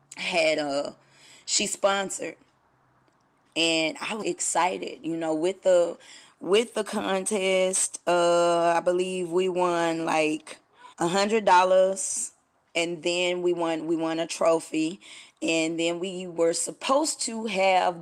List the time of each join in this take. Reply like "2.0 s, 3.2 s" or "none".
4.2 s, 10.9 s